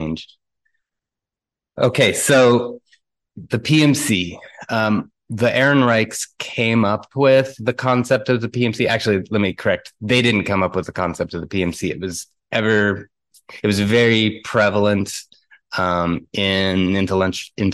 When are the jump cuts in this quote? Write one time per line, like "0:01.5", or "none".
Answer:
none